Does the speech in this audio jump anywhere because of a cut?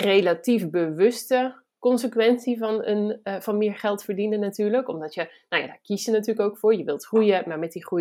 no; 0 cuts

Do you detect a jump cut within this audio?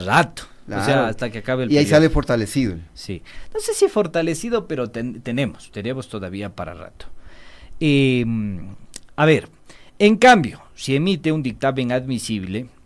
no; 0 cuts

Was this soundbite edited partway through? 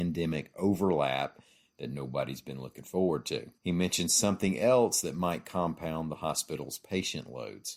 yes; 1 cut; at 3.6 s

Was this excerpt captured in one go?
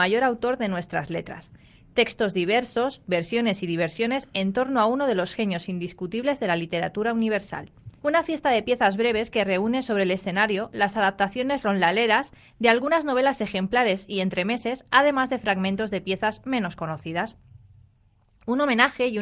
no; 2 cuts; at 3.0 s, 8.0 s

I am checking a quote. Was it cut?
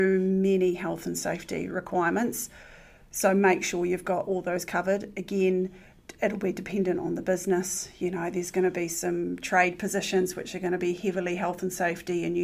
no; 0 cuts

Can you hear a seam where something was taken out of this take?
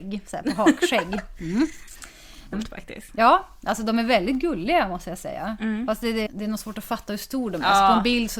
yes; 2 cuts; at 2.5 s, 6.3 s

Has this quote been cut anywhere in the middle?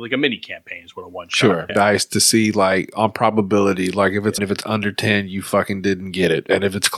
yes; 2 cuts; at 1.7 s, 4.4 s

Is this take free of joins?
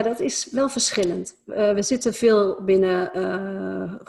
yes; 0 cuts

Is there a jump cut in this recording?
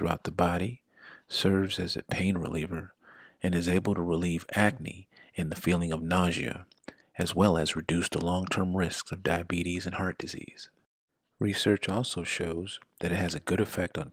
no; 0 cuts

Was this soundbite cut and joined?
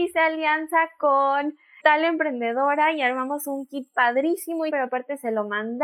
yes; 2 cuts; at 1.8 s, 4.7 s

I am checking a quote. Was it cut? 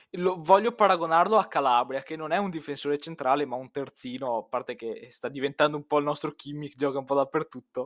no; 0 cuts

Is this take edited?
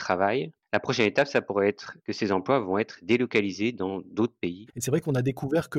yes; 1 cut; at 4.7 s

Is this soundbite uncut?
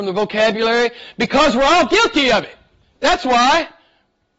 yes; 0 cuts

